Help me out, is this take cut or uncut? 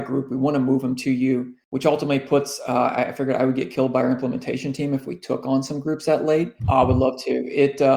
cut